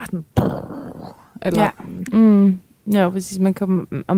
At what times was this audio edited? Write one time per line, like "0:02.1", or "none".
0:02.1

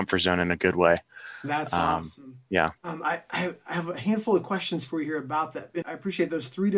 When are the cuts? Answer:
0:02.8
0:05.8

